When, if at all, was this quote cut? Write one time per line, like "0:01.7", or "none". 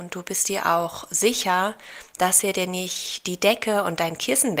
none